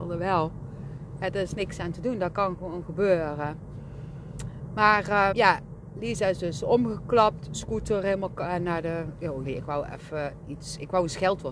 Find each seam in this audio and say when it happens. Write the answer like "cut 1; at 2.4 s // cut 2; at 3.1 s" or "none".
cut 1; at 5.3 s // cut 2; at 9.5 s